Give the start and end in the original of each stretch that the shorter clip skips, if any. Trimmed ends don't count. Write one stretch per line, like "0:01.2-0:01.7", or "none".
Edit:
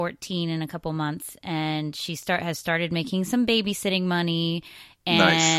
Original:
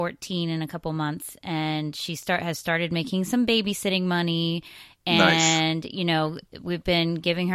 none